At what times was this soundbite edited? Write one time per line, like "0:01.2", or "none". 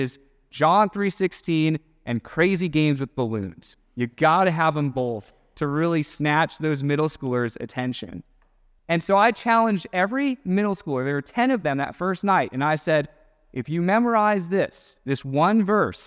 none